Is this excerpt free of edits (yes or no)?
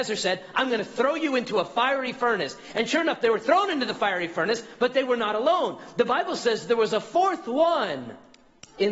yes